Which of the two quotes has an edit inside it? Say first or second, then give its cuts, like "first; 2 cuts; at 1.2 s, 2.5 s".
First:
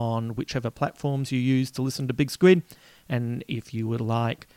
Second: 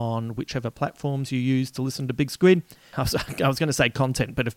second; 1 cut; at 2.9 s